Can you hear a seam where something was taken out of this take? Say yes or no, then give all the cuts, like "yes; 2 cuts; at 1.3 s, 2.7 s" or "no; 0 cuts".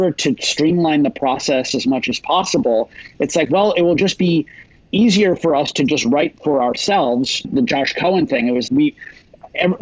yes; 2 cuts; at 7.4 s, 8.7 s